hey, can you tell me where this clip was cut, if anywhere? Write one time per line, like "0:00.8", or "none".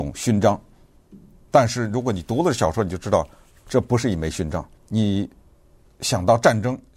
0:04.8